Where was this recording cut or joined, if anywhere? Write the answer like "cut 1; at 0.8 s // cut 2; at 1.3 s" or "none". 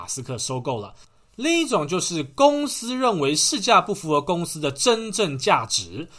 none